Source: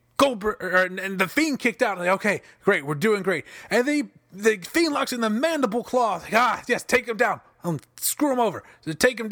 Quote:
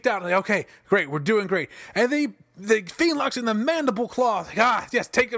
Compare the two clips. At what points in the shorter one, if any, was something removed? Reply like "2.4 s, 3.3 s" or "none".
none